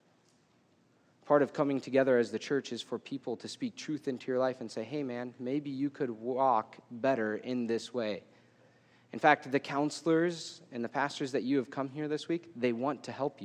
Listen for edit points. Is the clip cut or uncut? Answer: uncut